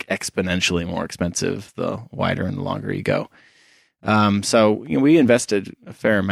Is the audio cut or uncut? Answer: uncut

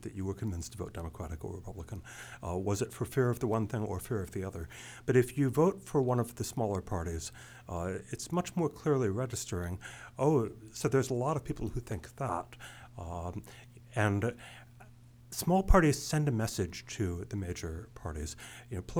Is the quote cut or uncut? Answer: uncut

